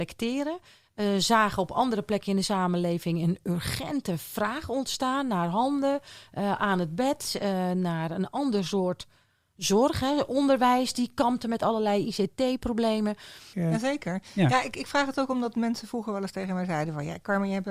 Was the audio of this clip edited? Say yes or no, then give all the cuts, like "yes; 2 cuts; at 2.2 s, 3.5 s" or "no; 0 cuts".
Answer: yes; 1 cut; at 13.5 s